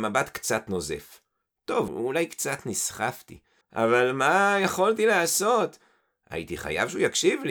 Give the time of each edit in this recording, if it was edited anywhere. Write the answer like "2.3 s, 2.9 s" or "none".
1.9 s, 3.6 s